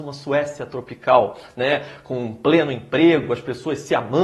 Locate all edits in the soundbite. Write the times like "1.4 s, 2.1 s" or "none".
none